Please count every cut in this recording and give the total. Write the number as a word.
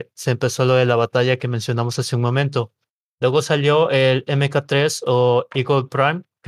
zero